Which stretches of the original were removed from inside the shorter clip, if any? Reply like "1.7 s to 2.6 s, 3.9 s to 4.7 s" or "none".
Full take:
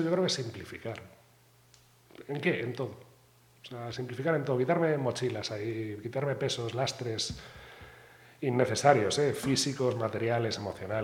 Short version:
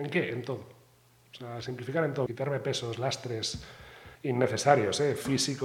4.6 s to 6.0 s, 7.9 s to 8.3 s

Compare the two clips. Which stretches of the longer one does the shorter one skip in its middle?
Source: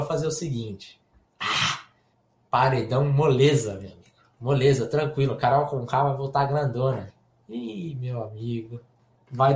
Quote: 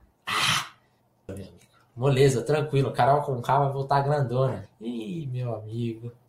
2.4 s to 3.7 s, 7.2 s to 7.4 s

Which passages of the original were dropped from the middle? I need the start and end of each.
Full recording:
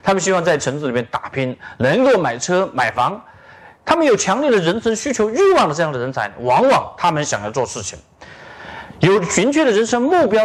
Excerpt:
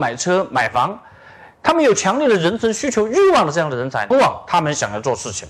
6.3 s to 6.6 s

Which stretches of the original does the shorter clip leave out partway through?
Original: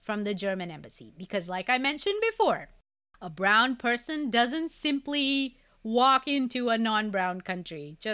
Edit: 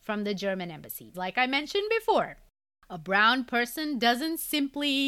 1.1 s to 1.5 s

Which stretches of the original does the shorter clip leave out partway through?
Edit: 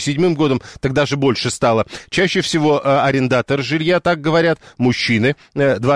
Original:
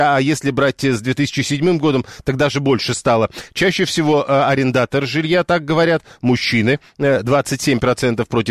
none

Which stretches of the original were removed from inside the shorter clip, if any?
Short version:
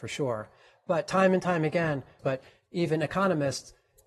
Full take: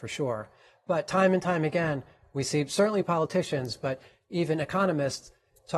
2.2 s to 3.8 s

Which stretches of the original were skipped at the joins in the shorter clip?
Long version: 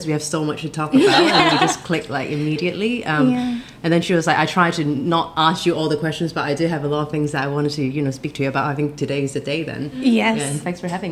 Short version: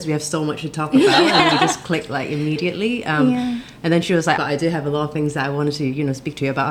4.4 s to 6.3 s

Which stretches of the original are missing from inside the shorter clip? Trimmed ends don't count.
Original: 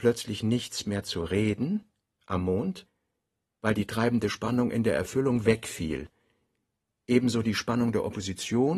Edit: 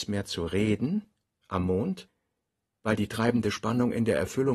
none

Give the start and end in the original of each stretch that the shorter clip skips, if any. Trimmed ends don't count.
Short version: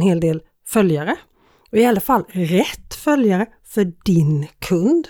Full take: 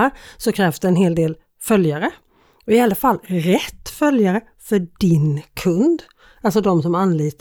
none

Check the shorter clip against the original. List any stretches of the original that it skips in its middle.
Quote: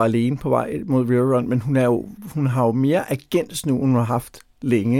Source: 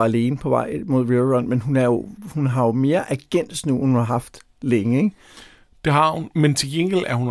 none

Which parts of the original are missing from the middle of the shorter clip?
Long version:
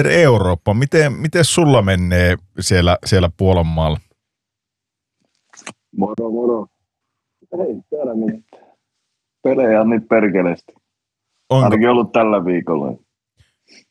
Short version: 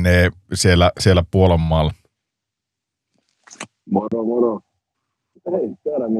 none

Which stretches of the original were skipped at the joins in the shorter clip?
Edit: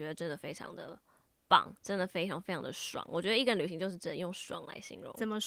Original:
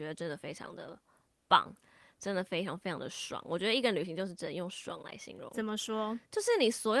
1.8 s to 2.1 s

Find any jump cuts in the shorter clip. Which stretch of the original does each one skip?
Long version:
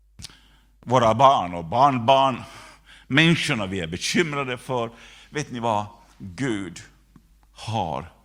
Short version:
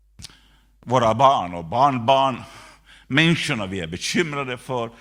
none

